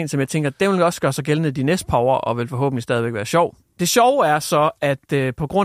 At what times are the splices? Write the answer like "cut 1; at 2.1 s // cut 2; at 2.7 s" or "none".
cut 1; at 3.6 s